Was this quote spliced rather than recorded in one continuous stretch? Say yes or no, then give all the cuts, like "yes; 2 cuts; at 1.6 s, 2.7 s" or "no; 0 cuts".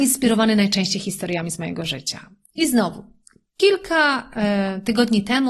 no; 0 cuts